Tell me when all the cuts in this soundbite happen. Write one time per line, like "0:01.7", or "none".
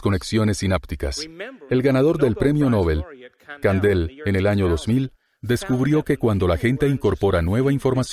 0:01.7